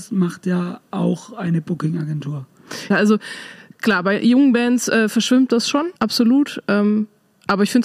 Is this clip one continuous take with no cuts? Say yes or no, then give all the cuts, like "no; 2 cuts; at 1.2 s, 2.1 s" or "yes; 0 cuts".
no; 2 cuts; at 2.9 s, 6.0 s